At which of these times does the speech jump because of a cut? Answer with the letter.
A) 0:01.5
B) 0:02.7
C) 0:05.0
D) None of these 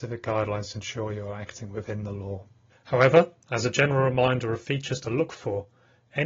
B